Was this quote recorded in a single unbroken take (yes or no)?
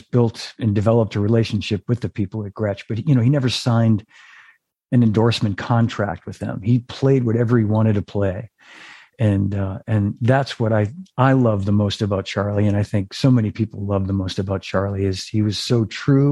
yes